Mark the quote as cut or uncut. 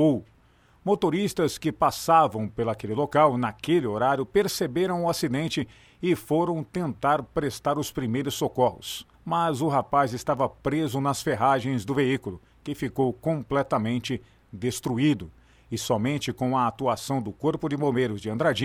cut